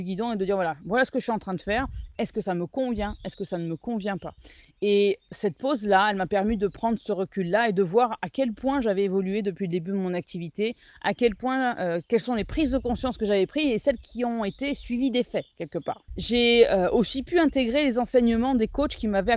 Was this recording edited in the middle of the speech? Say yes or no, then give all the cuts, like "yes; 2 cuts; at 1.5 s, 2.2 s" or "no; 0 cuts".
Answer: yes; 1 cut; at 16.1 s